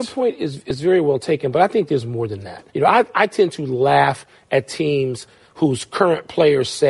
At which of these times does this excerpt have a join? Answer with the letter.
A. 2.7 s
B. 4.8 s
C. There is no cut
A